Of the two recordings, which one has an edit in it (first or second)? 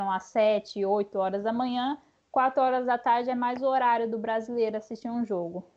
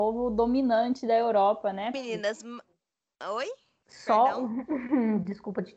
second